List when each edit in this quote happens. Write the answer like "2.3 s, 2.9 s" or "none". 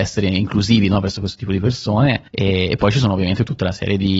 2.3 s